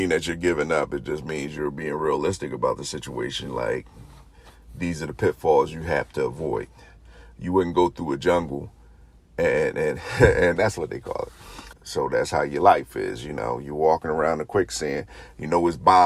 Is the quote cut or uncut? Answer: cut